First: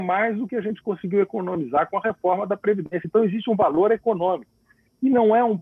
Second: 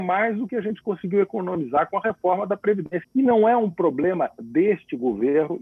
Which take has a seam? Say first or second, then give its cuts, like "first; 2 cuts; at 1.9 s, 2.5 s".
second; 1 cut; at 3.0 s